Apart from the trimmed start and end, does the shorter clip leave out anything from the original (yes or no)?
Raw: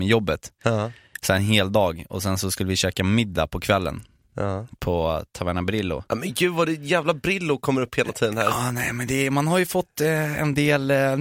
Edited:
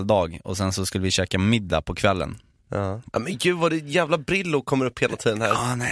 yes